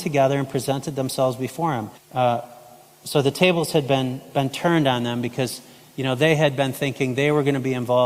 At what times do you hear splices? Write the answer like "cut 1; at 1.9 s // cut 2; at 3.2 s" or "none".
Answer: cut 1; at 2.0 s